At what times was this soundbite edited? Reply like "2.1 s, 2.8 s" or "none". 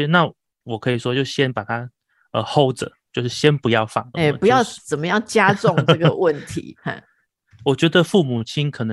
4.1 s